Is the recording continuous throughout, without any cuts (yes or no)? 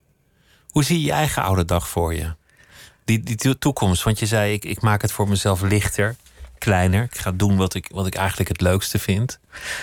yes